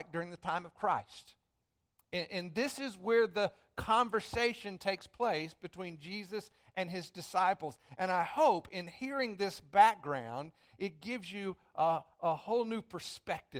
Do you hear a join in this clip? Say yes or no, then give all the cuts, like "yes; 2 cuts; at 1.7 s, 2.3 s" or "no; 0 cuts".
no; 0 cuts